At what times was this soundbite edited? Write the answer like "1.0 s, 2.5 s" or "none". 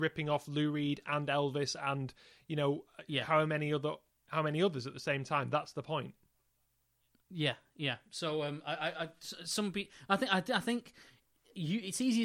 none